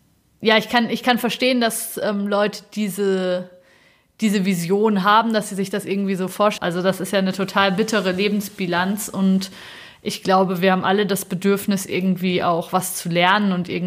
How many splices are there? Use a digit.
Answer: 1